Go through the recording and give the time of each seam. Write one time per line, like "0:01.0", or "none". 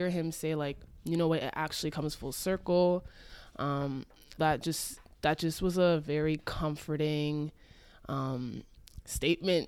0:04.4